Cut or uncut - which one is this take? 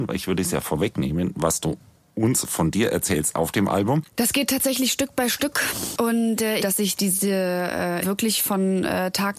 cut